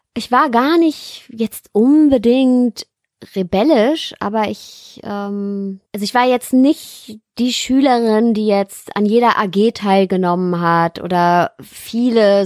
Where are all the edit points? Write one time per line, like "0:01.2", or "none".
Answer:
0:05.9

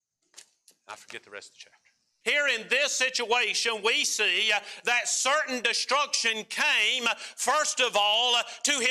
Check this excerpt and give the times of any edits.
0:02.2

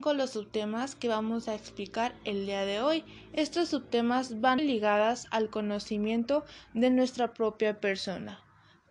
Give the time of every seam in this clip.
0:04.6

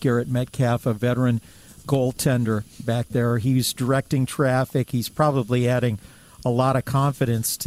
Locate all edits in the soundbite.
none

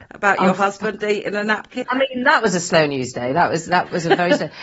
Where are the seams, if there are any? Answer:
0:01.8

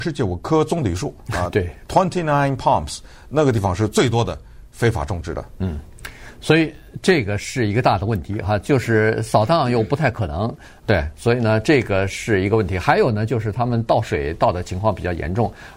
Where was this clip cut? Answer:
0:10.8

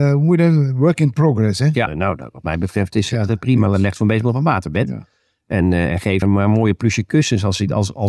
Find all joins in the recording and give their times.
0:01.9
0:06.2

